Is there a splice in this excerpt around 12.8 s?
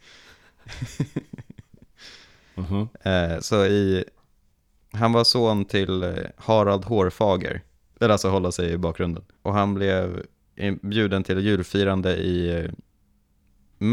no; 2 cuts; at 7.9 s, 9.4 s

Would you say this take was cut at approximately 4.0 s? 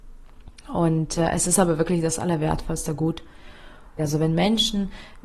yes; 1 cut; at 4.0 s

